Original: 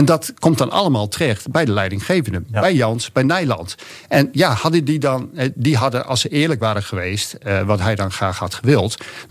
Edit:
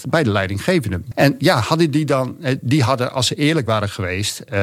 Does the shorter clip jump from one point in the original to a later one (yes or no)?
yes